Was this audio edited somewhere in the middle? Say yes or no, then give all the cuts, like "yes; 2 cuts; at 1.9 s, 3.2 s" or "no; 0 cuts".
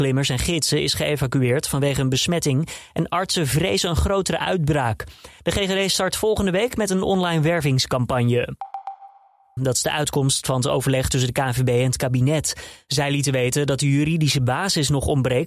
yes; 2 cuts; at 5.4 s, 9.6 s